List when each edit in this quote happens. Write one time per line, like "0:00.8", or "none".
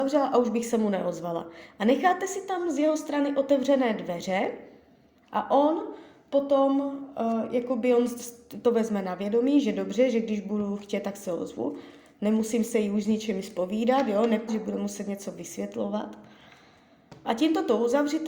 0:14.5
0:17.2